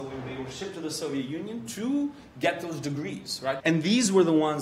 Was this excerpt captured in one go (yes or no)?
no